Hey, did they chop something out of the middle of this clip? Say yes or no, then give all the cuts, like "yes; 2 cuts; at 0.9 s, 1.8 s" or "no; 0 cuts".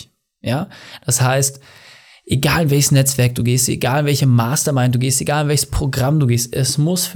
no; 0 cuts